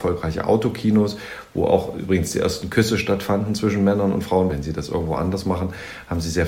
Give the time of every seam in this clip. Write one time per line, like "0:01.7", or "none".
0:04.5